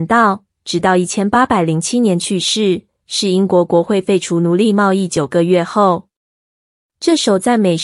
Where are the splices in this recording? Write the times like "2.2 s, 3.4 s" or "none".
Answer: none